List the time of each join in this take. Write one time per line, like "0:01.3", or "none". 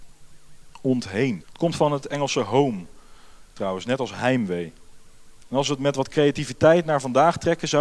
0:01.4